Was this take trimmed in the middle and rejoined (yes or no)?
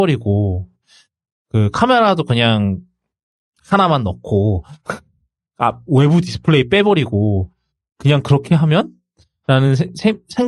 no